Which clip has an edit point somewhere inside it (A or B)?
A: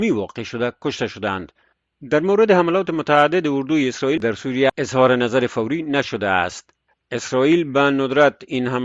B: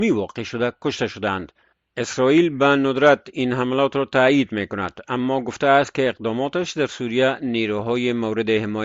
B